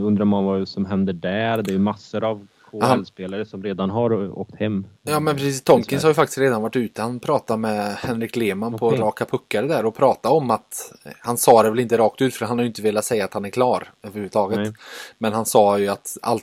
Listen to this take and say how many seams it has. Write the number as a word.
zero